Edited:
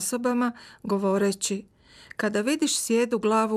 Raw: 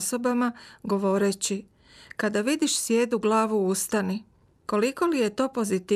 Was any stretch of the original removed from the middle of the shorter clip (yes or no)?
no